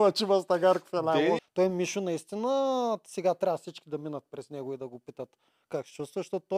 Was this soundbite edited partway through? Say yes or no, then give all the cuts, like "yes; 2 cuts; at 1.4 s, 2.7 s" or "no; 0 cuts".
yes; 1 cut; at 1.4 s